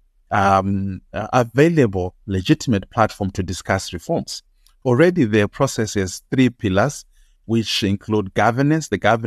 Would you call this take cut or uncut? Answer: uncut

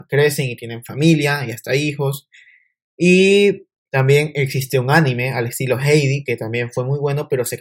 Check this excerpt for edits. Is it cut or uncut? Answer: uncut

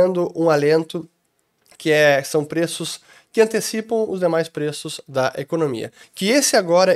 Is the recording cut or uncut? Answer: cut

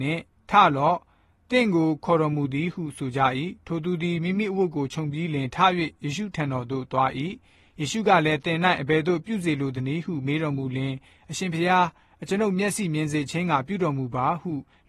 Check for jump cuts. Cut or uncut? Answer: uncut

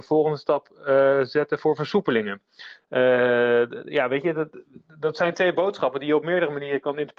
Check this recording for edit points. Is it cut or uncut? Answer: uncut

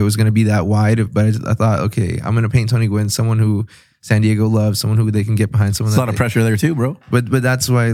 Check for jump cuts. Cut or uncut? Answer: uncut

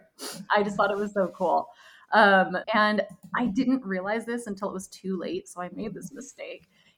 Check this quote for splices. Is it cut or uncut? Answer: cut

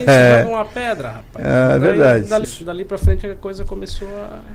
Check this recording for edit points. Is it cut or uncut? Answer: cut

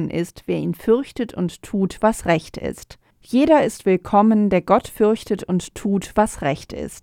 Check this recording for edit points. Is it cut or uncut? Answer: cut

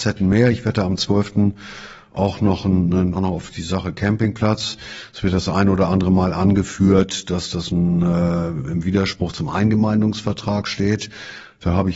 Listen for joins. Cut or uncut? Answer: cut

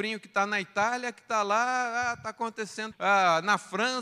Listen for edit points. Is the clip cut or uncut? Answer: cut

